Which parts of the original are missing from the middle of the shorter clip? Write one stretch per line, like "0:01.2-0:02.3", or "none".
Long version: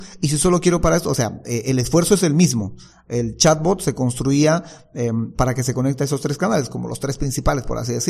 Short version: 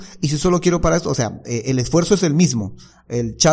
none